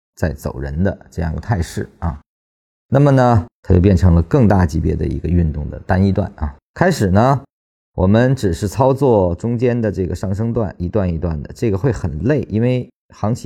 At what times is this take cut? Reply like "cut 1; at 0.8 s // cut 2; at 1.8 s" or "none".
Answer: cut 1; at 6.7 s